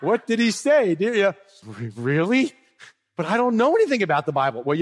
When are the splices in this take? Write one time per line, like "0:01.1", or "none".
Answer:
0:01.6